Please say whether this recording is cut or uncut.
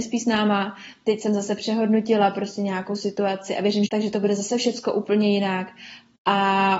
cut